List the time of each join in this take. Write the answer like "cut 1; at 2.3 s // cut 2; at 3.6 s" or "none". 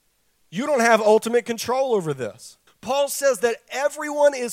cut 1; at 2.7 s